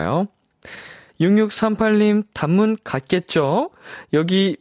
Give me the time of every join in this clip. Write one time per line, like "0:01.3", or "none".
0:01.1